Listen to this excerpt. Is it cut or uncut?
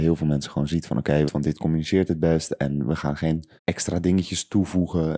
cut